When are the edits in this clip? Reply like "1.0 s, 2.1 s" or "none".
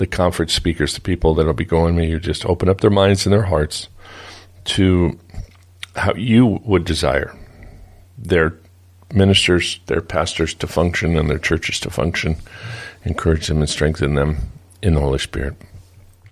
none